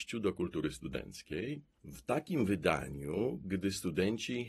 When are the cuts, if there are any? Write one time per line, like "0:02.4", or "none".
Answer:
0:01.7